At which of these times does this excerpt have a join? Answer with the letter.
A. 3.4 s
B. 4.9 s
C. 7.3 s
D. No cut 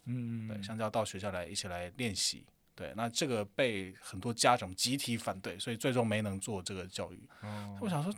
C